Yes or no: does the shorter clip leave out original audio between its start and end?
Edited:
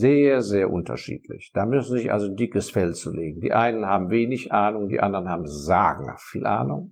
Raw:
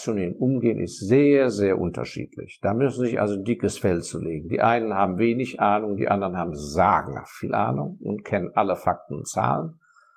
no